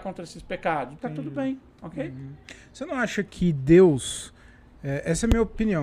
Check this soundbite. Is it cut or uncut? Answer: cut